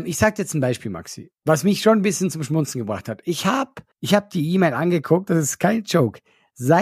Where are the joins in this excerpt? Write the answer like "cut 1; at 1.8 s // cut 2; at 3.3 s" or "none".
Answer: cut 1; at 3.9 s